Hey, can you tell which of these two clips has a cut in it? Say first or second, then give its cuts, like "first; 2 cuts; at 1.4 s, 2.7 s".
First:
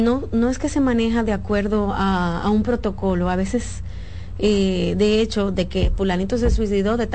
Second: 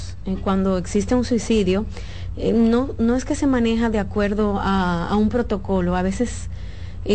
first; 1 cut; at 5.5 s